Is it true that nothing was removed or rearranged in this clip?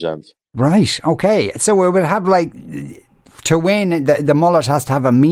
yes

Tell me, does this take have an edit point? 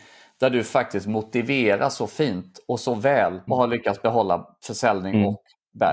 yes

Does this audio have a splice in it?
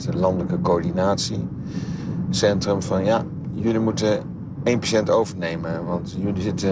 no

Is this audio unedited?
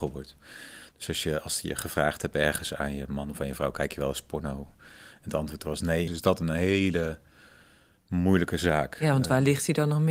no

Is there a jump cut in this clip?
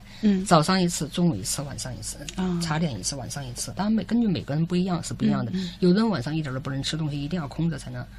yes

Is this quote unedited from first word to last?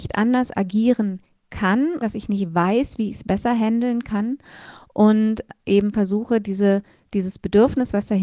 no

